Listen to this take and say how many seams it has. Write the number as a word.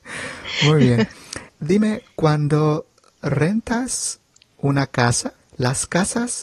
two